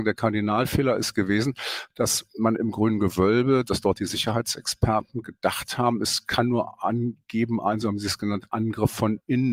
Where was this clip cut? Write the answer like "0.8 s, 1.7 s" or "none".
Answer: none